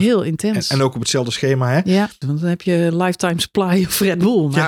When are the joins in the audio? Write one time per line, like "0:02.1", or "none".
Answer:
0:02.2